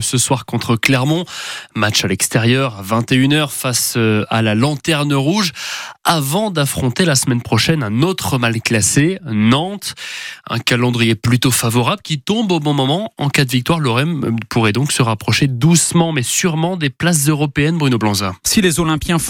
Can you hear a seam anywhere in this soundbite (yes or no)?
no